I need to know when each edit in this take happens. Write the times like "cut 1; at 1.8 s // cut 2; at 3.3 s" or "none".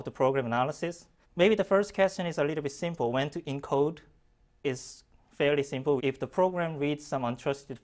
cut 1; at 1.2 s // cut 2; at 6.0 s